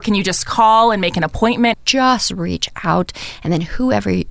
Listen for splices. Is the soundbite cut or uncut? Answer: cut